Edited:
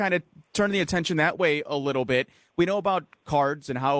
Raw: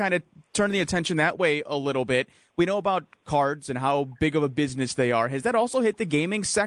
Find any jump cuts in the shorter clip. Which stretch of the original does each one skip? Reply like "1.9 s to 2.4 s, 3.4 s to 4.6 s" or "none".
none